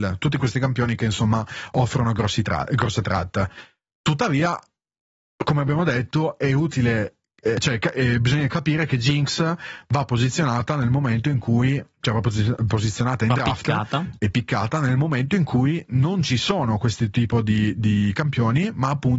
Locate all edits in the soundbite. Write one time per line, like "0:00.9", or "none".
none